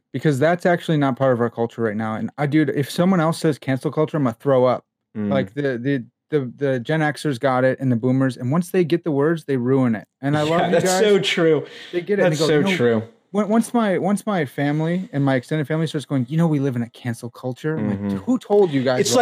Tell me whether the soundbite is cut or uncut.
uncut